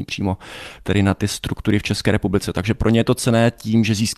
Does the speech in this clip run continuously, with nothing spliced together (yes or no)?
yes